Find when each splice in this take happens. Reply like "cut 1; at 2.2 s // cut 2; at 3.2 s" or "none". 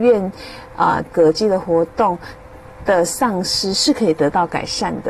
cut 1; at 1.1 s